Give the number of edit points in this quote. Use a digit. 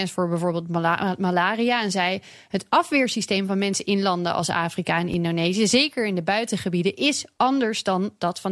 0